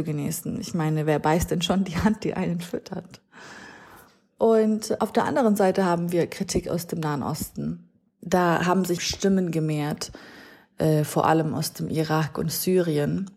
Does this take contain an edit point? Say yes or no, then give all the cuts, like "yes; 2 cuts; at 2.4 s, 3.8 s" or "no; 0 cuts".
yes; 1 cut; at 9.0 s